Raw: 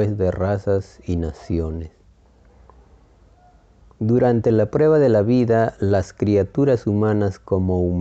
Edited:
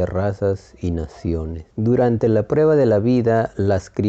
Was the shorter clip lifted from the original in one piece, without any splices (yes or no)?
no